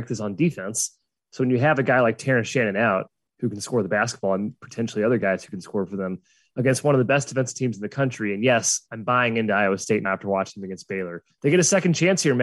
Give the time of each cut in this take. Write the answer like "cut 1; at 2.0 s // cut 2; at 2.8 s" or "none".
cut 1; at 10.0 s // cut 2; at 11.3 s